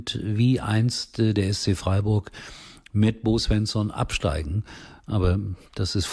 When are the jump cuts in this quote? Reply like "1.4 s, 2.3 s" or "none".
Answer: none